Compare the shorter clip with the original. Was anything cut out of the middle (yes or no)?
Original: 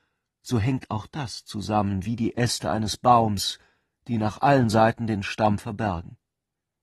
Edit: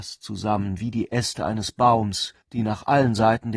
yes